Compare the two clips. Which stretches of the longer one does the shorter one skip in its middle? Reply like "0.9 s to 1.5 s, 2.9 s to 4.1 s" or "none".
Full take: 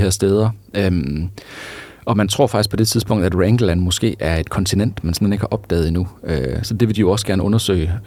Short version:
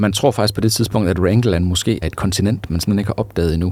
4.2 s to 4.4 s

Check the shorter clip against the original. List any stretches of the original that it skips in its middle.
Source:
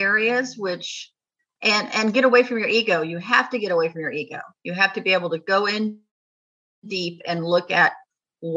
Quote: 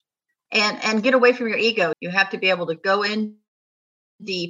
3.0 s to 4.6 s

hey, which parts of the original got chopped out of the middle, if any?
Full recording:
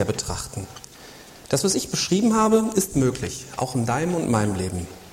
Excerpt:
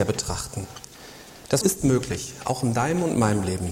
1.6 s to 2.7 s

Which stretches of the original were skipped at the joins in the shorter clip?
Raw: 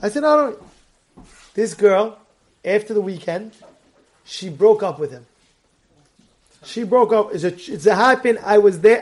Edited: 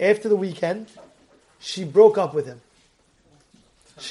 none

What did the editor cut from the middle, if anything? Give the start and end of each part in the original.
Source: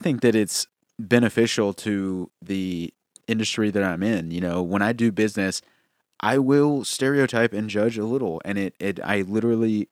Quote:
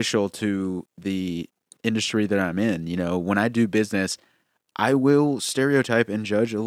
none

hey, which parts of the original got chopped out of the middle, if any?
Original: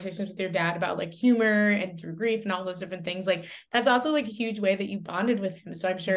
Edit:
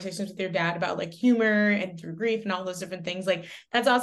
none

